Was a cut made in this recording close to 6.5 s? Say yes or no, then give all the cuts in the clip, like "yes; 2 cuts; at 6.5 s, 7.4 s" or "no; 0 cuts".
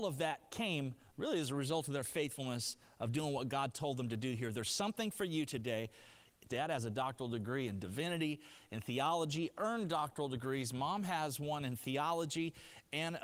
yes; 1 cut; at 6.5 s